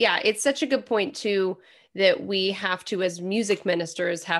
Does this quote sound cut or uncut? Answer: uncut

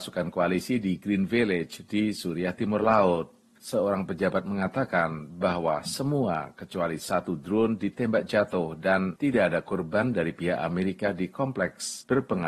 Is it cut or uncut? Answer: cut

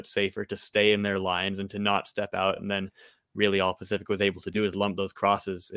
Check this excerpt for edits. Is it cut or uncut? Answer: uncut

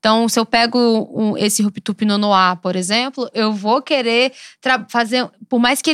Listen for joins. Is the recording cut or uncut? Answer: cut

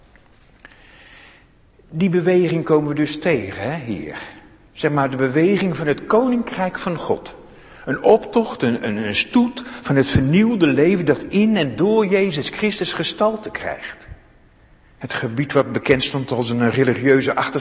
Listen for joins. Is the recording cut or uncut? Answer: cut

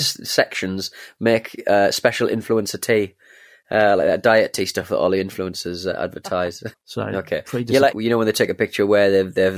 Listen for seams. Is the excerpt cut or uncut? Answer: cut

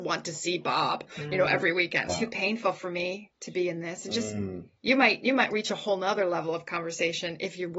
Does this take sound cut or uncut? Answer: cut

